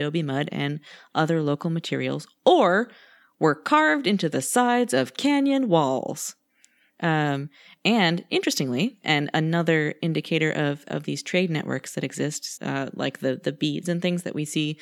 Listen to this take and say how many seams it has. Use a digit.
2